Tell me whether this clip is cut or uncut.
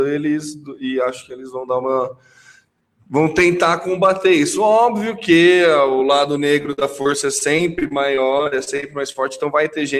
uncut